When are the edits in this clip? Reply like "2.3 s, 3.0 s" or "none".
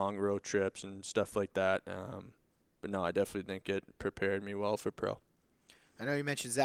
none